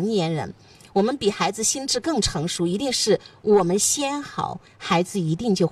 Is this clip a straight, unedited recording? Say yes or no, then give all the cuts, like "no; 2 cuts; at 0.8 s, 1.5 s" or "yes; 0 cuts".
yes; 0 cuts